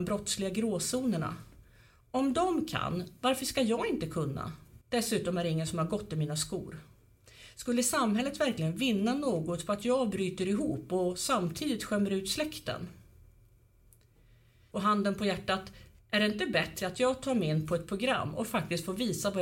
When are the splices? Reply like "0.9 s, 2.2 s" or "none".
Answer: 4.8 s, 14.7 s